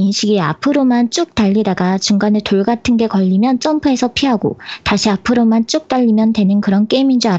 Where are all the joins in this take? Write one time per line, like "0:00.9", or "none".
none

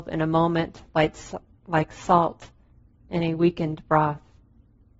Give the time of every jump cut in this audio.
none

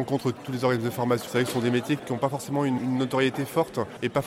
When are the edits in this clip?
0:01.3
0:02.8

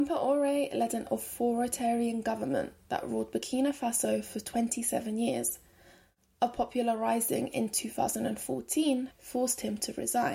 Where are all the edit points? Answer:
0:09.1

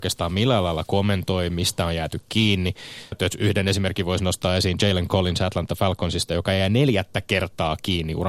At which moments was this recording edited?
0:03.1

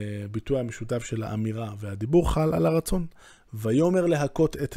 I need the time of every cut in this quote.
none

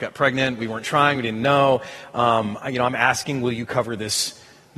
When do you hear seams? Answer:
none

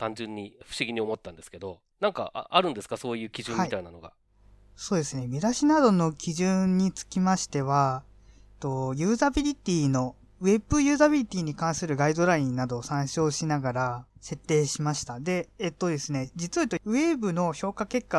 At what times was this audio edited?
0:01.9
0:14.1

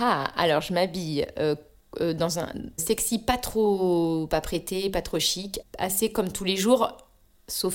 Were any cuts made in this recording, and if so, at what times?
0:02.8
0:05.6

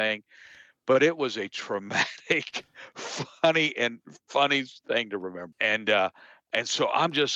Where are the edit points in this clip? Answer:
0:05.5

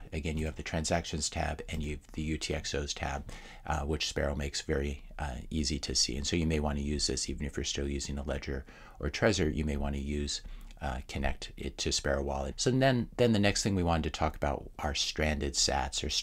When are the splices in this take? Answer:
0:12.5

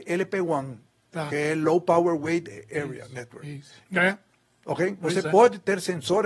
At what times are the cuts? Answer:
0:03.8

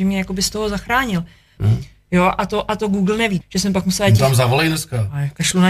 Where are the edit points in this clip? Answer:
0:01.6
0:03.4

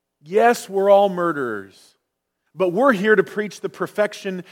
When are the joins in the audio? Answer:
0:02.5

